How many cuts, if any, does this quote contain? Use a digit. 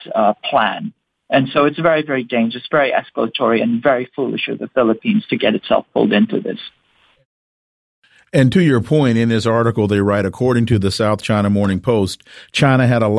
0